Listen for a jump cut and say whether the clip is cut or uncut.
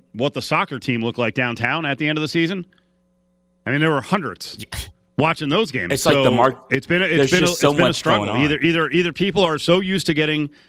uncut